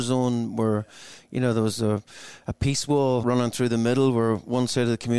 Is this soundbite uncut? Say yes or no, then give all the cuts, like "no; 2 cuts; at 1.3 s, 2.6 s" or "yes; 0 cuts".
no; 1 cut; at 3.2 s